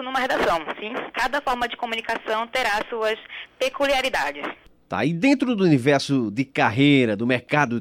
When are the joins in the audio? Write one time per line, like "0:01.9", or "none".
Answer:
0:01.1